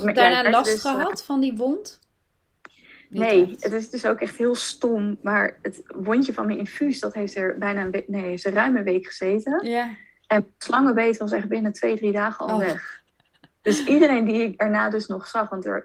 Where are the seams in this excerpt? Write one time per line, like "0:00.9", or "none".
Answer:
none